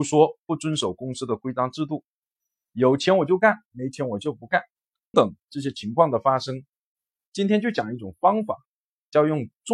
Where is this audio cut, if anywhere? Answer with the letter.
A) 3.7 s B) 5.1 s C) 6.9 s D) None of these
B